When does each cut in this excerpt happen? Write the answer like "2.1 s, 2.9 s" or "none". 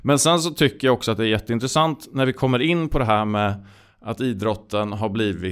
none